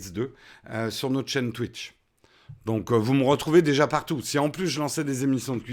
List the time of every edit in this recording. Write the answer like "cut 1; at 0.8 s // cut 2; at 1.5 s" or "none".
none